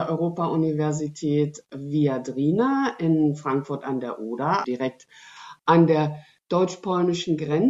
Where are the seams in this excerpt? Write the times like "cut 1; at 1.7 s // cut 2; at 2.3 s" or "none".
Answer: cut 1; at 4.6 s